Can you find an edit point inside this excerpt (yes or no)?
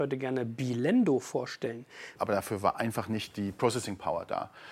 yes